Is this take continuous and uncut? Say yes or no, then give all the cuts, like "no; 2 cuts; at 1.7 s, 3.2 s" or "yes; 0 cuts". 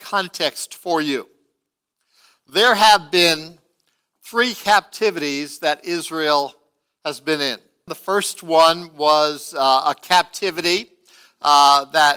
no; 1 cut; at 7.9 s